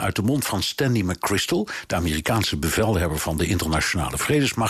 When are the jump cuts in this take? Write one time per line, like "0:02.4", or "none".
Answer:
none